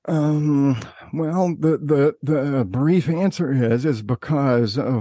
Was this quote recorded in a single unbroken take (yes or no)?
yes